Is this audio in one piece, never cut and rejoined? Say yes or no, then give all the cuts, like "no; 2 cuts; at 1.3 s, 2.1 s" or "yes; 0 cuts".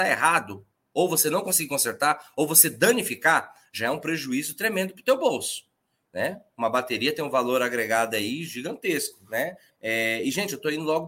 no; 1 cut; at 9.7 s